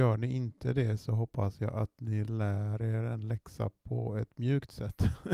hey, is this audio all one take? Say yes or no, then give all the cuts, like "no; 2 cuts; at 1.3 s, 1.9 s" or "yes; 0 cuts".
yes; 0 cuts